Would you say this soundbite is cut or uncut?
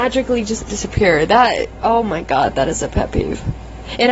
uncut